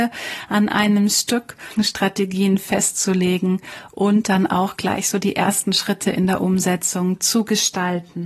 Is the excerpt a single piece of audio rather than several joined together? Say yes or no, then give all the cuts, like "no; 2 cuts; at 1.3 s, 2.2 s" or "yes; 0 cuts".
no; 1 cut; at 1.8 s